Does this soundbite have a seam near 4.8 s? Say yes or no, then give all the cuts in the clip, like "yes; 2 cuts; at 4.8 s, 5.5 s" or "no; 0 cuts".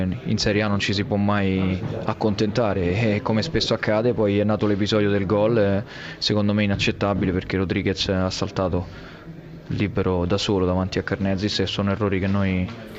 no; 0 cuts